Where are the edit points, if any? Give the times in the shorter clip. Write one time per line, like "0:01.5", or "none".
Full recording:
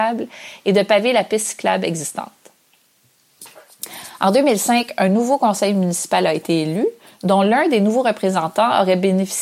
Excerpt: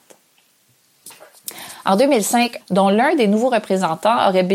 0:02.6